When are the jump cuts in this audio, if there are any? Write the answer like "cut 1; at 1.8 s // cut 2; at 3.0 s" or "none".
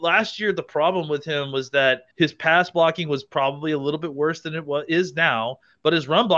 cut 1; at 2.1 s